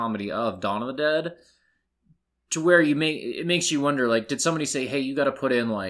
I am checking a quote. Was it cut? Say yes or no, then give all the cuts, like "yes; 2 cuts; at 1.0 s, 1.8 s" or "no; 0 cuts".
no; 0 cuts